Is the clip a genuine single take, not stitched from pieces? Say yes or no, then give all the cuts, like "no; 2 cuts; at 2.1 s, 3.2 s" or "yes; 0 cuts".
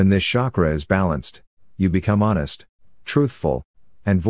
yes; 0 cuts